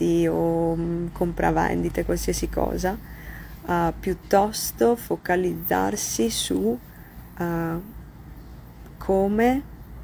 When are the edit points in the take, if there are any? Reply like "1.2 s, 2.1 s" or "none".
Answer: none